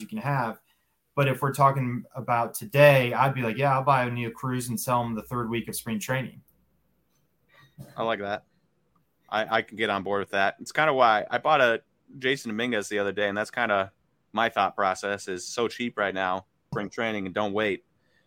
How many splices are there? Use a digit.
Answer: 1